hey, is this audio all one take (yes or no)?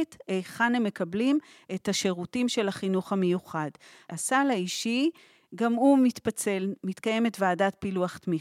no